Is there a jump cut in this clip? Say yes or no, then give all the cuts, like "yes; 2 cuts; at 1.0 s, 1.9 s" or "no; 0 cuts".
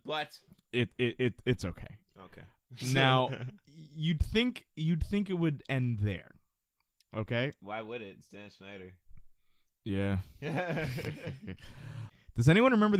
no; 0 cuts